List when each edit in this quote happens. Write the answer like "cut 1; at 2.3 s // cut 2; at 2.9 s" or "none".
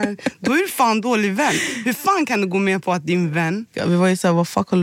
cut 1; at 3.7 s